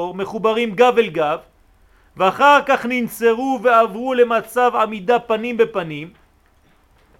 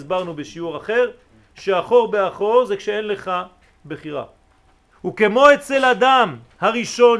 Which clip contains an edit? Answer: second; 1 cut; at 4.9 s

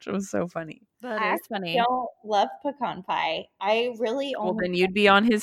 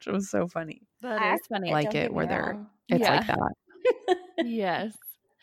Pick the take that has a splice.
second; 1 cut; at 1.7 s

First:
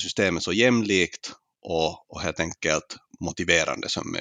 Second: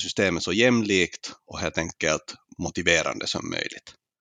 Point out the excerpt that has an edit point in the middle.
second; 1 cut; at 1.4 s

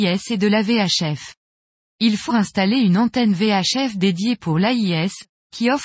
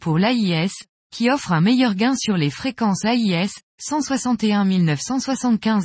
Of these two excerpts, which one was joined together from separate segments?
first; 1 cut; at 2.3 s

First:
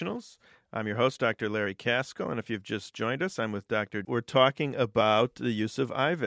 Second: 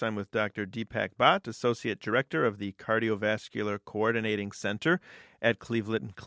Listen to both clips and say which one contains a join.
first; 1 cut; at 4.0 s

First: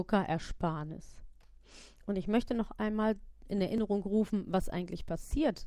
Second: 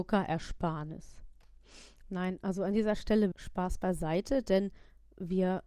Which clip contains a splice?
second; 2 cuts; at 2.0 s, 3.3 s

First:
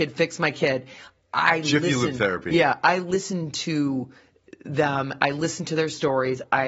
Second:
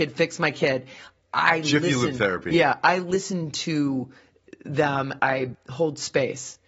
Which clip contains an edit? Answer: second; 1 cut; at 5.2 s

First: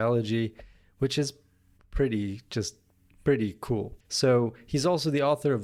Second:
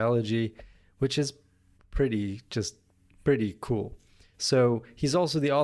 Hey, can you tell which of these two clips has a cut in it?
first; 1 cut; at 4.0 s

